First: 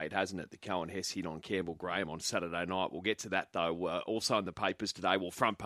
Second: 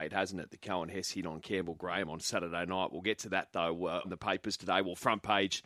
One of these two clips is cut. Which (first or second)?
second